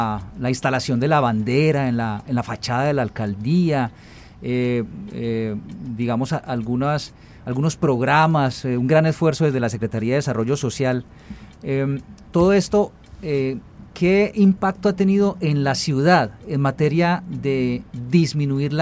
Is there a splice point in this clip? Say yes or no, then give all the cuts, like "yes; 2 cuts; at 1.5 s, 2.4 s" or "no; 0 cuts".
no; 0 cuts